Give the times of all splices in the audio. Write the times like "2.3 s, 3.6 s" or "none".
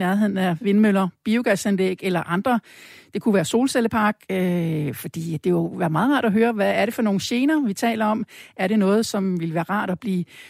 none